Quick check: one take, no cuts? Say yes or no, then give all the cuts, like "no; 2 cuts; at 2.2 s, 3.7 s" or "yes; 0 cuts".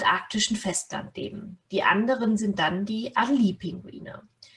yes; 0 cuts